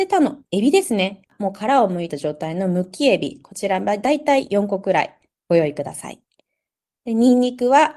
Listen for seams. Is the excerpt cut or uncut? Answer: uncut